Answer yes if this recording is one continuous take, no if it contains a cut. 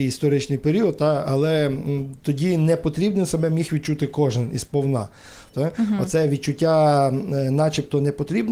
no